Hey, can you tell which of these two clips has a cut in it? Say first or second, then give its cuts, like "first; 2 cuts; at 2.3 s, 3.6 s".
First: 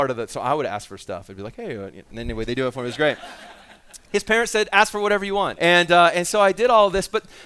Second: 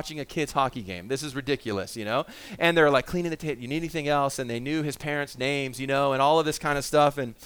first; 1 cut; at 5.6 s